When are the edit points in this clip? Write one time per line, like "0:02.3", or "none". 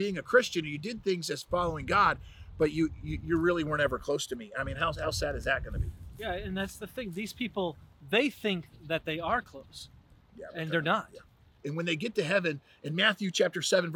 0:11.6